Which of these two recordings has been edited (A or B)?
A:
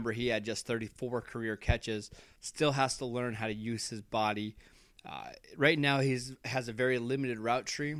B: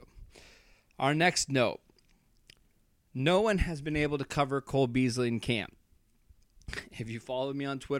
A